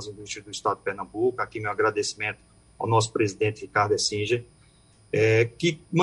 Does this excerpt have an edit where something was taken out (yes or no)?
no